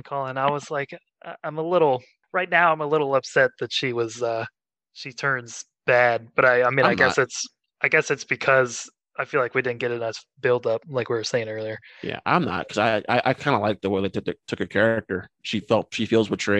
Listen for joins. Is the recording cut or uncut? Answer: uncut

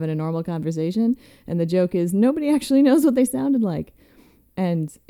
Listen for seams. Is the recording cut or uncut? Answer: uncut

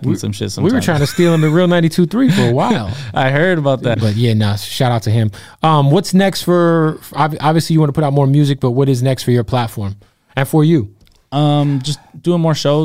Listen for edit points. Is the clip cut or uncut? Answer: cut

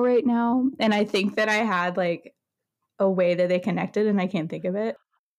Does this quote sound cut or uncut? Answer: uncut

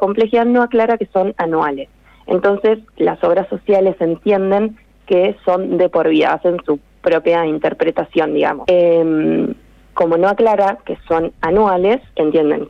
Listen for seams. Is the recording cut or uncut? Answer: cut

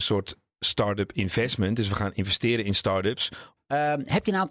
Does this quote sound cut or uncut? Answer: cut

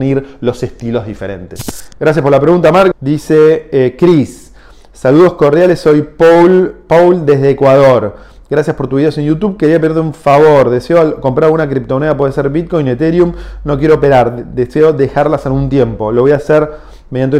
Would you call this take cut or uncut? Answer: cut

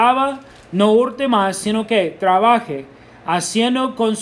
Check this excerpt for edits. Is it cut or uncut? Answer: uncut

